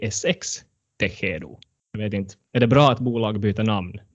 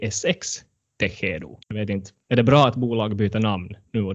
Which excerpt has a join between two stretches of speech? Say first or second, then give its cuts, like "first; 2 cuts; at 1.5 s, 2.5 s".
second; 1 cut; at 1.6 s